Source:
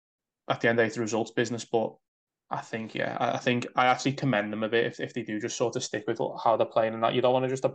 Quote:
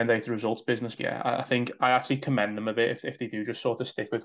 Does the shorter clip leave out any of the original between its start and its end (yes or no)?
yes